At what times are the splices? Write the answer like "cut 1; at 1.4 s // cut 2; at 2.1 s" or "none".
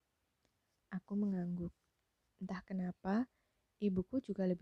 cut 1; at 2.2 s